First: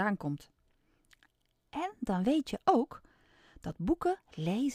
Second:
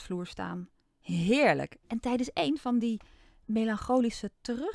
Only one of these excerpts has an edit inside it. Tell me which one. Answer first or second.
second